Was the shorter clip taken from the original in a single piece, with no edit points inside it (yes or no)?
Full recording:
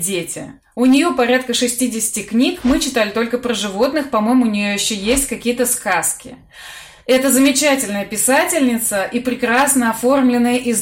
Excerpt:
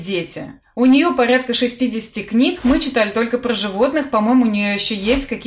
yes